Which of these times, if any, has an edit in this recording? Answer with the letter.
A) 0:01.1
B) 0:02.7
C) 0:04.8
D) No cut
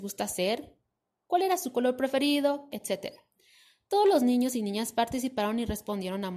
B